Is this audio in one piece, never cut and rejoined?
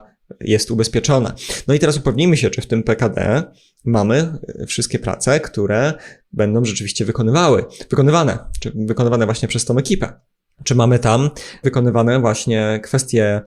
yes; 0 cuts

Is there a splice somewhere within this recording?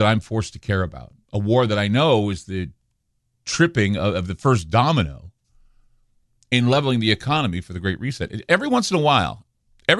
no; 0 cuts

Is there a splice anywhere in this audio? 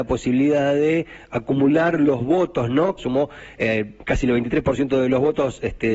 yes; 1 cut; at 3.0 s

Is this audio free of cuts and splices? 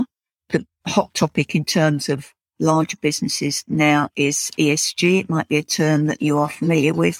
yes; 0 cuts

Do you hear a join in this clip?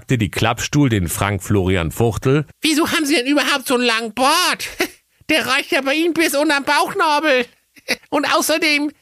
yes; 2 cuts; at 2.5 s, 8.0 s

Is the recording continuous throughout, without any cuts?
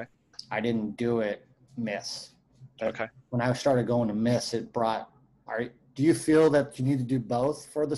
no; 1 cut; at 5.5 s

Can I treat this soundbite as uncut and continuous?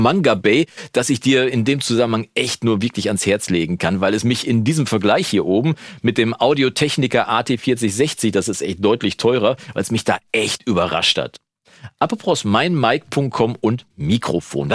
yes; 0 cuts

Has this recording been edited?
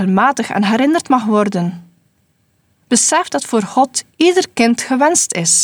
yes; 1 cut; at 2.8 s

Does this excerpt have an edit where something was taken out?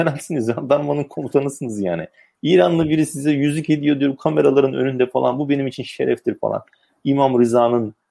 no; 0 cuts

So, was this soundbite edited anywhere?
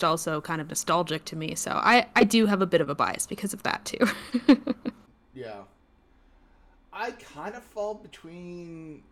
no; 0 cuts

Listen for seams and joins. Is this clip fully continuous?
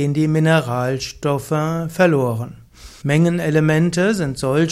no; 1 cut; at 3.0 s

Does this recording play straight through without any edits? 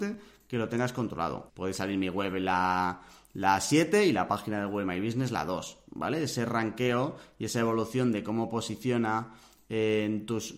no; 1 cut; at 1.5 s

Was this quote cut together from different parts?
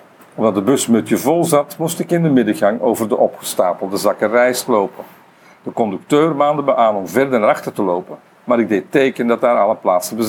no; 0 cuts

